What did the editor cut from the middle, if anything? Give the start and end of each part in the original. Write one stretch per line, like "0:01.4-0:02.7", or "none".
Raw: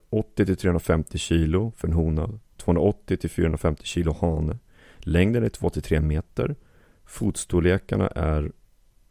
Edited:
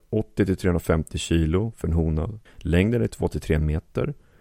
0:02.5-0:04.9